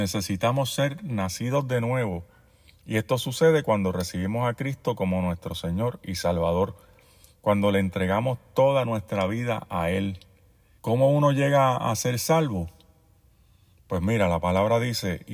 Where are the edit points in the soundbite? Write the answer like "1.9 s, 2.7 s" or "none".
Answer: 10.8 s